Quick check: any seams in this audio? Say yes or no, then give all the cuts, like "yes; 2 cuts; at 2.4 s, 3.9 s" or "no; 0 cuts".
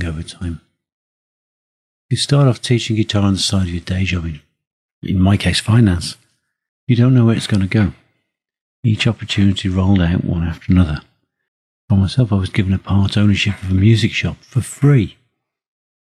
no; 0 cuts